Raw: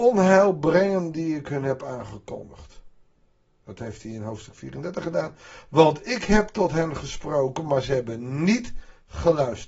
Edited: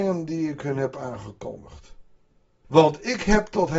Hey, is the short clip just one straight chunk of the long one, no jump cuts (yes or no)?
no